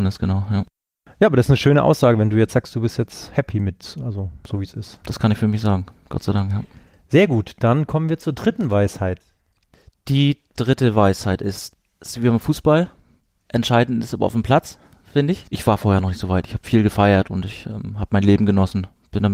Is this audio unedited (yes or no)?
no